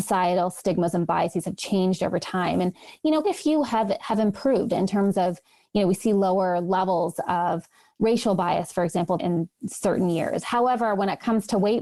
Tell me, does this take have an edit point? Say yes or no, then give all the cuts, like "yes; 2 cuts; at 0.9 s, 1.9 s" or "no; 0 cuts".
yes; 2 cuts; at 3.2 s, 9.2 s